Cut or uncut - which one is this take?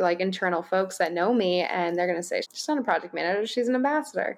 cut